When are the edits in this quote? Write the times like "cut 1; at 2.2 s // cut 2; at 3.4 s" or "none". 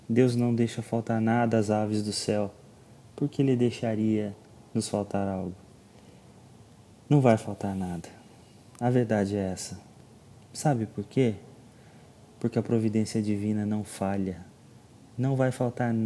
none